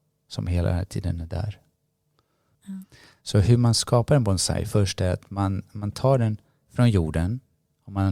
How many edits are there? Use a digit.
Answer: 1